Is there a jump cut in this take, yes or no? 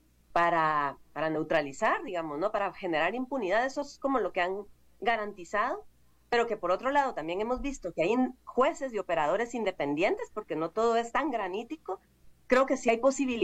no